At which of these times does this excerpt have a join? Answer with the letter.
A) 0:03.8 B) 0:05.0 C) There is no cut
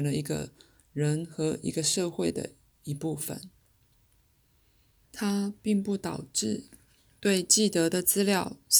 B